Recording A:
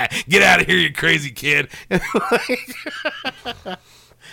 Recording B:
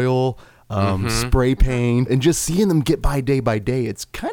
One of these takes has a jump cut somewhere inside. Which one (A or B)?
B